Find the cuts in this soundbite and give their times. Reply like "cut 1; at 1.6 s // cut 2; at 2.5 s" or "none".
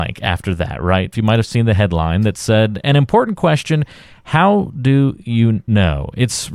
cut 1; at 1.1 s

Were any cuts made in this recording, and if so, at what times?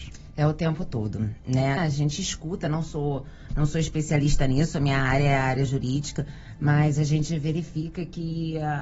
cut 1; at 1.8 s

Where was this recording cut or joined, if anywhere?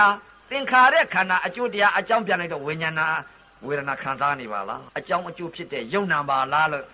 cut 1; at 4.9 s

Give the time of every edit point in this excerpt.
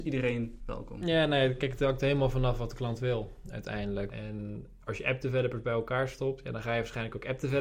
cut 1; at 4.1 s

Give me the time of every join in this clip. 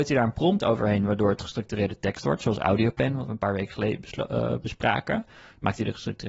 none

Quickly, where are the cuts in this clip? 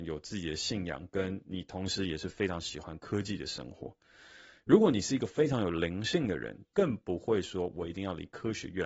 cut 1; at 6.6 s

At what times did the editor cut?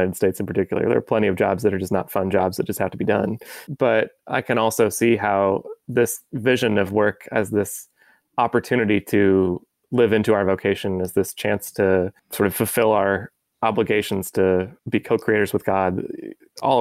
cut 1; at 3.7 s // cut 2; at 12.2 s // cut 3; at 14.8 s

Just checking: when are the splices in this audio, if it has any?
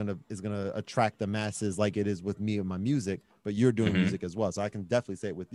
none

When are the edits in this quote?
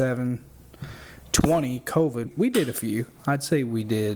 cut 1; at 2.3 s

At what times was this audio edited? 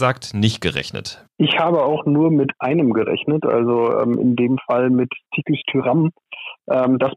cut 1; at 1.3 s

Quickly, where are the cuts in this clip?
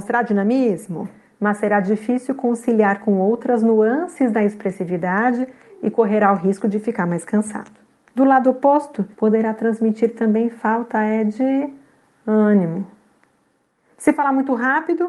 cut 1; at 8.1 s // cut 2; at 9.1 s

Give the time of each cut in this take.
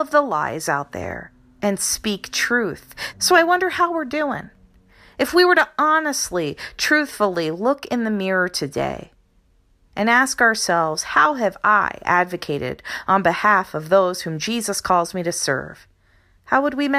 cut 1; at 3.1 s

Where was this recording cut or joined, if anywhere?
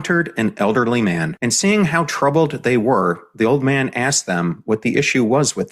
none

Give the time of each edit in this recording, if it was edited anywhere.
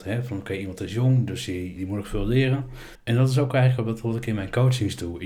cut 1; at 1.8 s // cut 2; at 3.0 s

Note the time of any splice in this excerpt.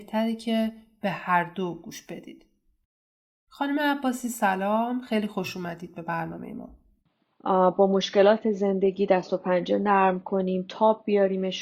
cut 1; at 7.3 s

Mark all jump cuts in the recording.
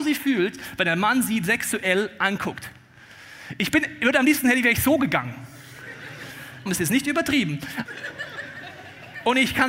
cut 1; at 6.7 s // cut 2; at 7.9 s

